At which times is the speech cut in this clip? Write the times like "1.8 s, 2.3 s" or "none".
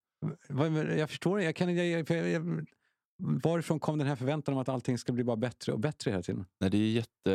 none